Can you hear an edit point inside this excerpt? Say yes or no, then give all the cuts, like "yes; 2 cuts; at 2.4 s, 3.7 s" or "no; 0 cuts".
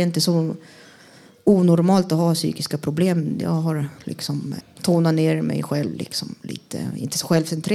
yes; 1 cut; at 4.6 s